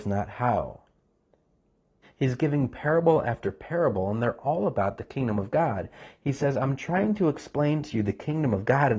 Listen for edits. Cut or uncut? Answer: cut